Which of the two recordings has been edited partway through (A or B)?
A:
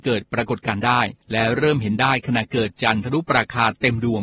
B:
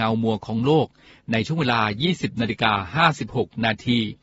A